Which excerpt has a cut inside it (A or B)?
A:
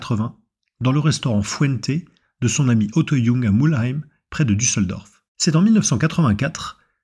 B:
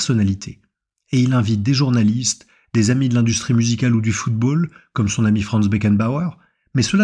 A